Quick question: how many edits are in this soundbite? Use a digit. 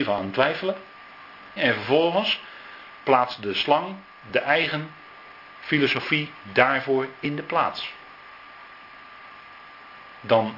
1